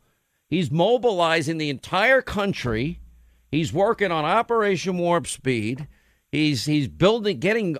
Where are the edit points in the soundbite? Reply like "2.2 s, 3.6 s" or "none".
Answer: none